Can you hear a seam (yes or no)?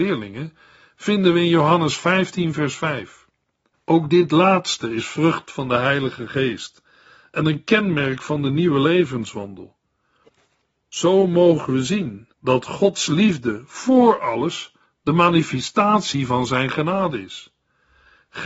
yes